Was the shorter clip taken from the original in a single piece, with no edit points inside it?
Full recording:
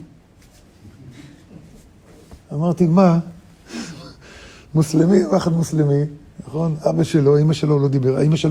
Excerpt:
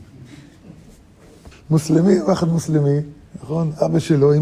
no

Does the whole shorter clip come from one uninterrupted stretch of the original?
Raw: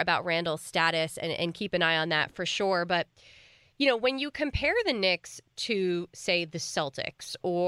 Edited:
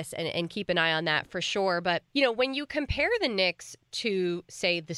no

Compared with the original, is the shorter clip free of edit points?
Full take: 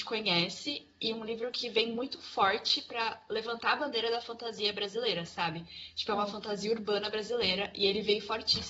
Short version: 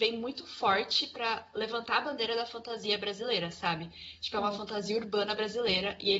yes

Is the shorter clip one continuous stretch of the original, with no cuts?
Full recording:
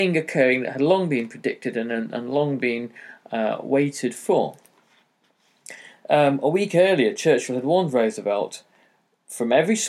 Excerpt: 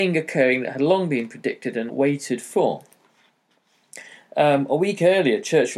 no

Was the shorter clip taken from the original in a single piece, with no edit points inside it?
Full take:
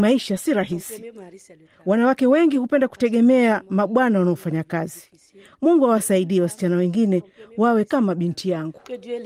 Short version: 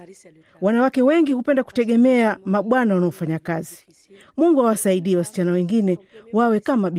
yes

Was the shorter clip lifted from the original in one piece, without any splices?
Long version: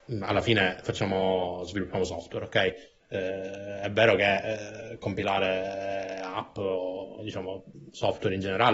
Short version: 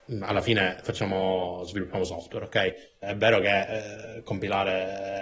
no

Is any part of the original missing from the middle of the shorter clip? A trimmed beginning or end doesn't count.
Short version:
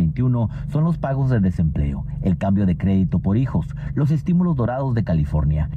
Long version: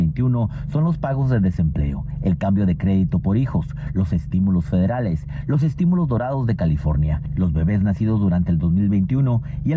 yes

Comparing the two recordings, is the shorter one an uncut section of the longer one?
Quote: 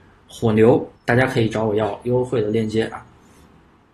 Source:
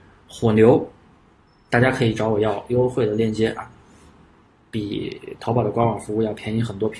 no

